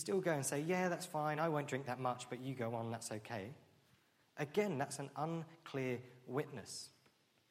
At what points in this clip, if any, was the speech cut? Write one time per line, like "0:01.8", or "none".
none